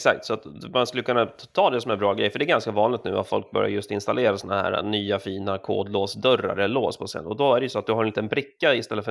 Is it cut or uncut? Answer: uncut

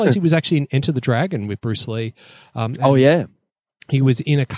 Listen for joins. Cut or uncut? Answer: uncut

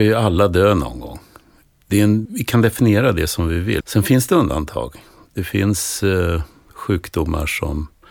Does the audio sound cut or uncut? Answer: cut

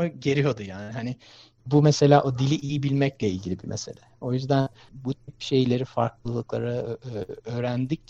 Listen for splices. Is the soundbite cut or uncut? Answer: uncut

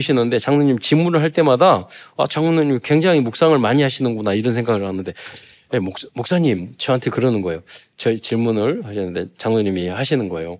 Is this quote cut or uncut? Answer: uncut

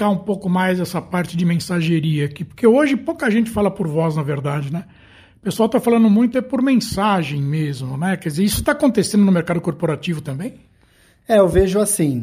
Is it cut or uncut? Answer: uncut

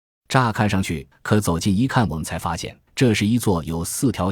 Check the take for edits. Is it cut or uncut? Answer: cut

